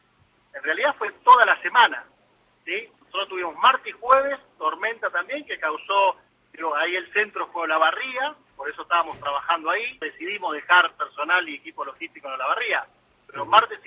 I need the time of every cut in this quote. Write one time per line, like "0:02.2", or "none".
0:10.0